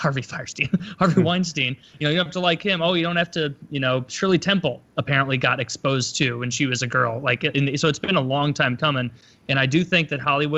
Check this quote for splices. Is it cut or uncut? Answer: uncut